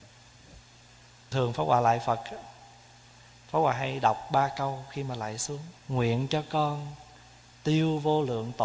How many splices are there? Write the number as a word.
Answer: two